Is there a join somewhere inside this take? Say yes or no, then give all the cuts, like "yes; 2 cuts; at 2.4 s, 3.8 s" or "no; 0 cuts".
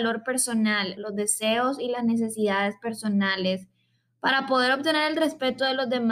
yes; 1 cut; at 1.0 s